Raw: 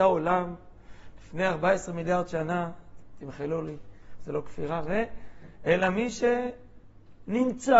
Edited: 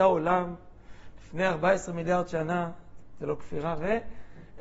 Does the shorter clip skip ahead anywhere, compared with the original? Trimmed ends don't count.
yes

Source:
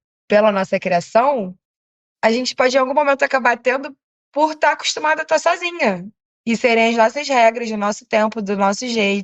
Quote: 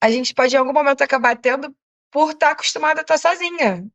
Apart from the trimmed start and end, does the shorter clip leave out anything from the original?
no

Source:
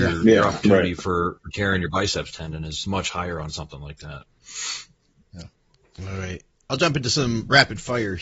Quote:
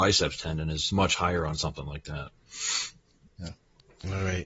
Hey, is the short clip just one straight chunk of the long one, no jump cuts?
yes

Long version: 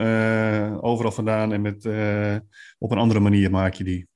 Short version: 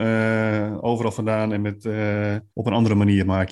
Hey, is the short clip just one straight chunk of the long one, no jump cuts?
no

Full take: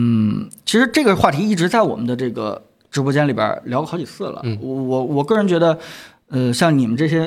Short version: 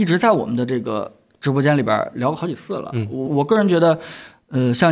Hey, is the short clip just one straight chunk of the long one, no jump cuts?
no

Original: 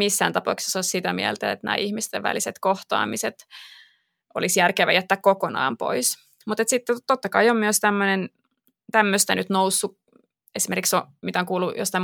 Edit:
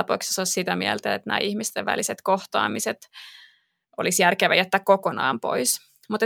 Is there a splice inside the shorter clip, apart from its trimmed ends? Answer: no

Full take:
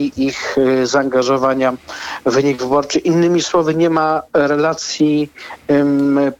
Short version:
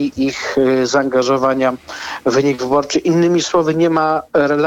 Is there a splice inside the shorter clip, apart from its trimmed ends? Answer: no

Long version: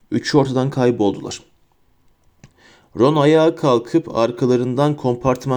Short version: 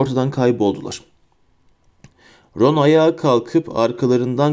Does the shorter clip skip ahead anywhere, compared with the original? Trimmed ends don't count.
no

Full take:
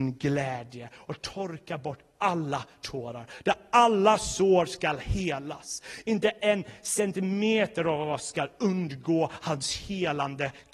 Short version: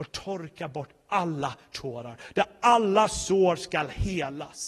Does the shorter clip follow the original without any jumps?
yes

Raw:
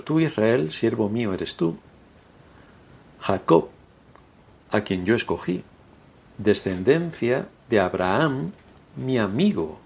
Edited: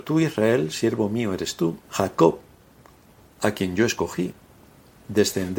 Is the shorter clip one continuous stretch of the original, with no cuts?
no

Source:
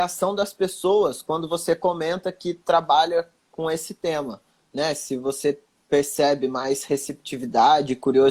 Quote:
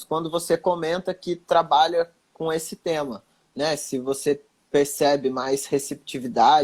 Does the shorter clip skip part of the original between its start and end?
no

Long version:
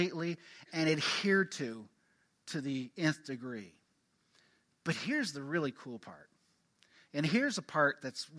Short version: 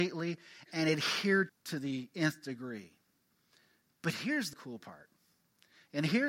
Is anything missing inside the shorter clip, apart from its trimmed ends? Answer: yes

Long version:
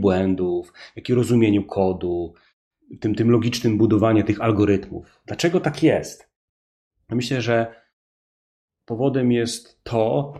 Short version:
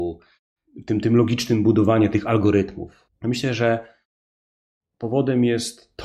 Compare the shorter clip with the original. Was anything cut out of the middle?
yes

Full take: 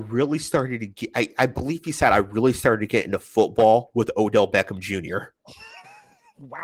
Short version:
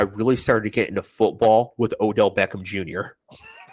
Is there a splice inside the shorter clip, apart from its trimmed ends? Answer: no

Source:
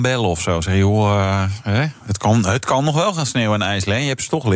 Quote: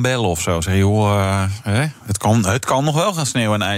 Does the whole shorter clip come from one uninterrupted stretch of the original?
yes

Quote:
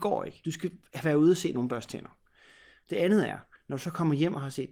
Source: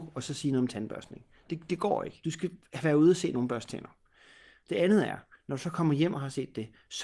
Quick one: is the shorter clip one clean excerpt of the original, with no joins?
yes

